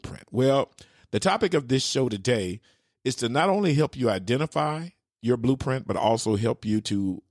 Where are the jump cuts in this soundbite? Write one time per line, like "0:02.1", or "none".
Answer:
none